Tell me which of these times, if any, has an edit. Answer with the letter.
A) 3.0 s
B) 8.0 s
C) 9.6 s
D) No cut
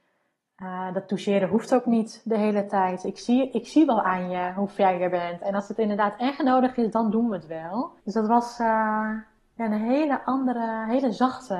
B